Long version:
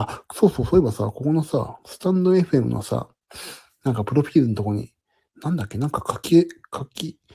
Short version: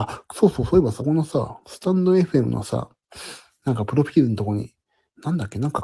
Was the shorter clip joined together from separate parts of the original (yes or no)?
yes